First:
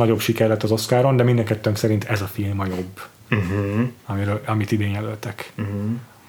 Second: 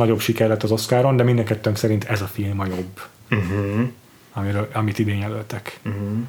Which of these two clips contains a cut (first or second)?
first